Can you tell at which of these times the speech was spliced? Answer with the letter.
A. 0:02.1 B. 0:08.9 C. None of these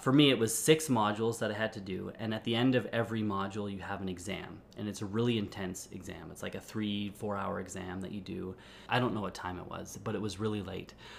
B